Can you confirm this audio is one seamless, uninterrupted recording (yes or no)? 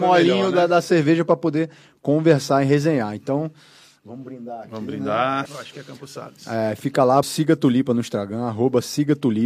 no